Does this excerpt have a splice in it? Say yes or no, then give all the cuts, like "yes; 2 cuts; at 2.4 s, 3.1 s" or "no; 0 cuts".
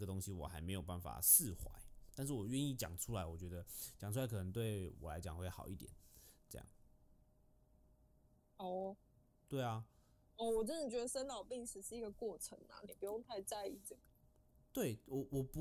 no; 0 cuts